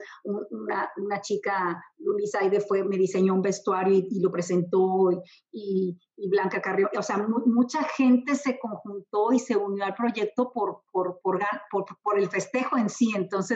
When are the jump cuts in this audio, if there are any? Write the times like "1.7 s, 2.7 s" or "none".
none